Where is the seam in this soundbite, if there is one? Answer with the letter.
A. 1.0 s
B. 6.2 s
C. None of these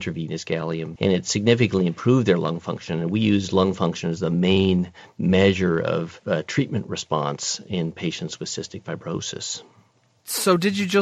A